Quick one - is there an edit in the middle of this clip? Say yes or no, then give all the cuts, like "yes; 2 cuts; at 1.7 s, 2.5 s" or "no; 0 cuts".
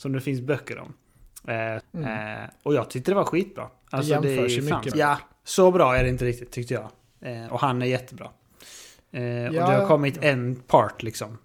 yes; 3 cuts; at 1.8 s, 4.9 s, 7.5 s